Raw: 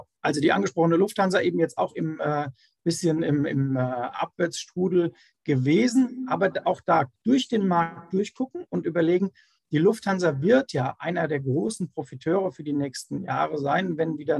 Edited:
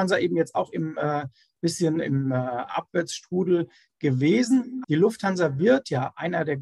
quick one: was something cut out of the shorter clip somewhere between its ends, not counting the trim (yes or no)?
yes